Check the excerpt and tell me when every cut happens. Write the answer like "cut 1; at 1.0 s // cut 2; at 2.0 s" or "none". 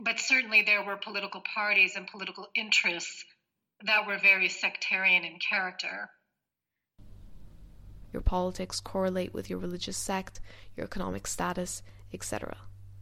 cut 1; at 8.1 s